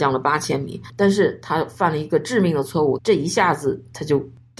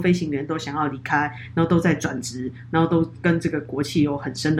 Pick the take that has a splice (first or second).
first